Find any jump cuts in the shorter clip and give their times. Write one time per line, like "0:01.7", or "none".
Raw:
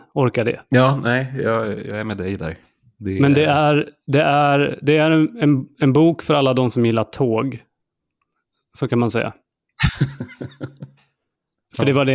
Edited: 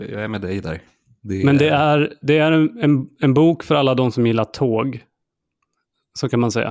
0:02.2